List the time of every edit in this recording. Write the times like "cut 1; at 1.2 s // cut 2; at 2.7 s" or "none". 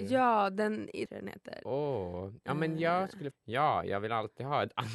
cut 1; at 1.1 s // cut 2; at 3.3 s